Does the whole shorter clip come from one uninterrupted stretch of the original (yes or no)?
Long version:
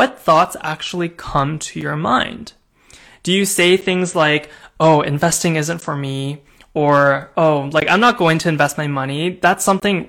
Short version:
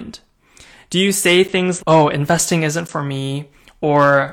no